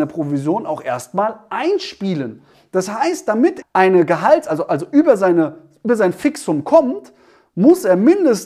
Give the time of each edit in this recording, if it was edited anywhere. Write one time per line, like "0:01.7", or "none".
0:03.6